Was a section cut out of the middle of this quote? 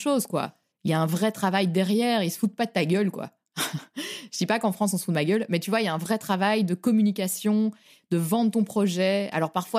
no; 0 cuts

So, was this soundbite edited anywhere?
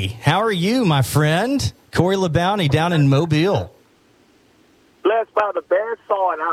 no; 0 cuts

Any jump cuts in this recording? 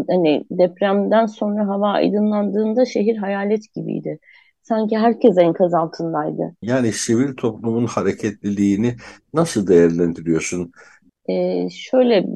yes; 2 cuts; at 6.6 s, 11.1 s

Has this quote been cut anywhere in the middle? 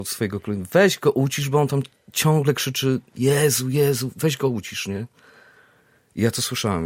no; 0 cuts

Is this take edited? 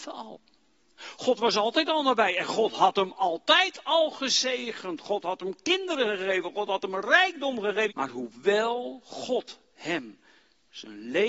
yes; 2 cuts; at 6.5 s, 7.9 s

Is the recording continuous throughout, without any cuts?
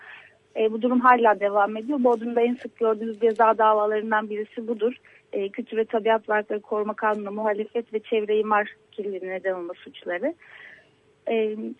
yes; 0 cuts

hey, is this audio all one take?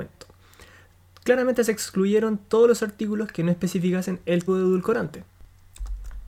no; 1 cut; at 4.5 s

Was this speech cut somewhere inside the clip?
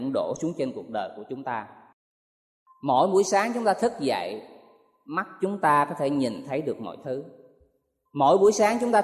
no; 0 cuts

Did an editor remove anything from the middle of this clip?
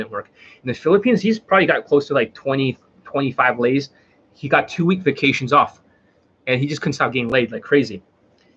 no; 0 cuts

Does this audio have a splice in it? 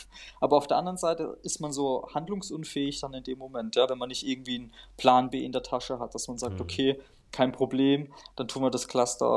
no; 0 cuts

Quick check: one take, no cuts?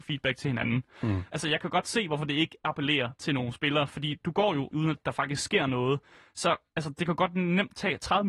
no; 2 cuts; at 1.3 s, 4.7 s

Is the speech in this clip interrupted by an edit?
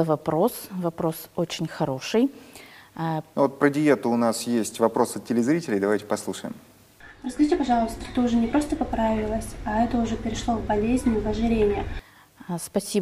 yes; 2 cuts; at 3.3 s, 8.0 s

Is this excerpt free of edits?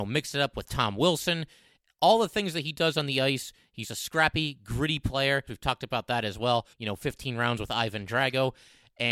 no; 3 cuts; at 3.8 s, 5.5 s, 6.7 s

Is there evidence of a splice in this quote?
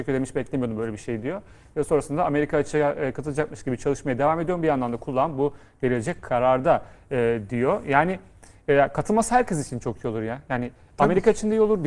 no; 0 cuts

